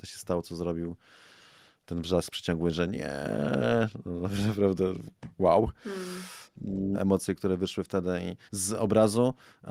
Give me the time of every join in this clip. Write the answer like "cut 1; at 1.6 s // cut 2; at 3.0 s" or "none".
cut 1; at 6.9 s // cut 2; at 8.5 s